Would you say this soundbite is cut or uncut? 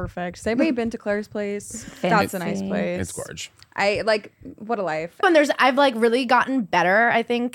cut